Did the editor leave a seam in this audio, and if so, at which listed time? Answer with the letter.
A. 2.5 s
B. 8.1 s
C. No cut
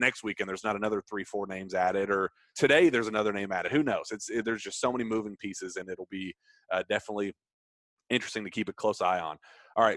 A